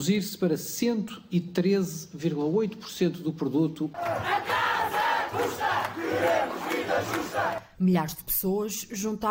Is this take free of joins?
yes; 0 cuts

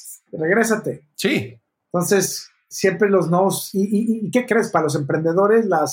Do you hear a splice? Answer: no; 0 cuts

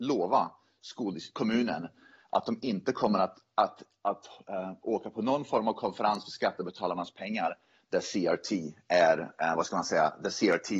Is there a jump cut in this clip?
no; 0 cuts

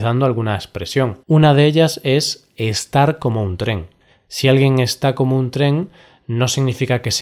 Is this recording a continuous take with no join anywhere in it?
no; 1 cut; at 1.2 s

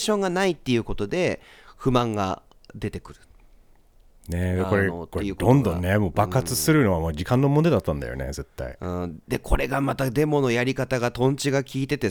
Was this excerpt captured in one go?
yes; 0 cuts

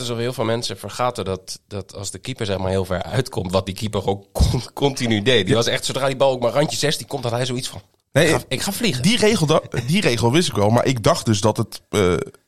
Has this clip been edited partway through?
no; 0 cuts

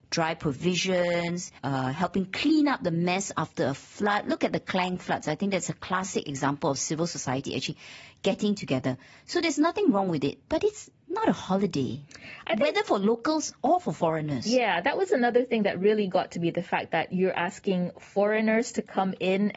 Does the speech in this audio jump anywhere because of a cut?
yes; 1 cut; at 1.6 s

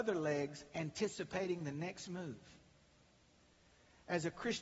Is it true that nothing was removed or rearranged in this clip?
yes; 0 cuts

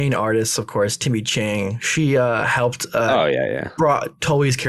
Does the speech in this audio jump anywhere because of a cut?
no; 0 cuts

